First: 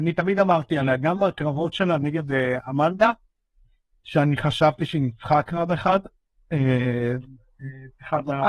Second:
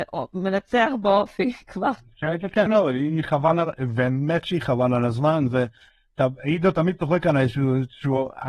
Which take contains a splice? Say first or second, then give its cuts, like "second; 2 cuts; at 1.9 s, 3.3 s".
second; 1 cut; at 2.7 s